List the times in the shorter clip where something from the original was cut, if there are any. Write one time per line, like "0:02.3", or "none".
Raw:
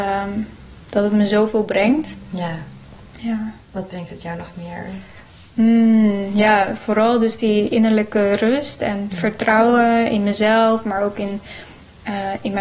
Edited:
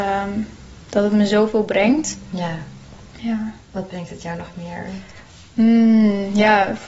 none